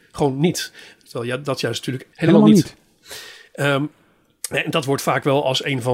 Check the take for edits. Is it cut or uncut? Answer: cut